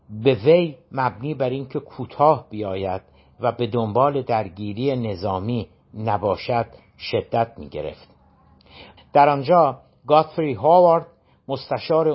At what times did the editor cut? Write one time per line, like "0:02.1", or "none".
0:09.0